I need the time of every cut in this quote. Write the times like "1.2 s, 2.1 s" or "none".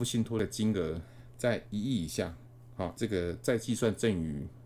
2.9 s